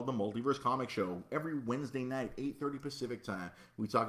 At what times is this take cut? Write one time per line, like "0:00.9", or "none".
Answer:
none